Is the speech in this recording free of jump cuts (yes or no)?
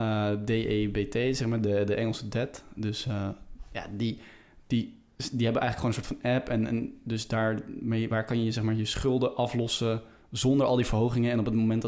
yes